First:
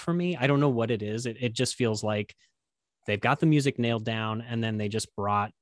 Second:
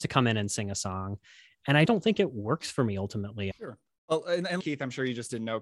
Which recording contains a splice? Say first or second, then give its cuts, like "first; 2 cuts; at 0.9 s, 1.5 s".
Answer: second; 3 cuts; at 1.8 s, 3.5 s, 4.6 s